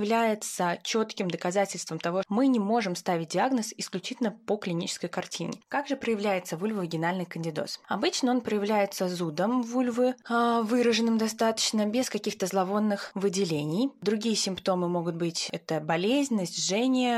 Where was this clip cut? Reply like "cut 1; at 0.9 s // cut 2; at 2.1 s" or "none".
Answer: cut 1; at 2.2 s // cut 2; at 5.6 s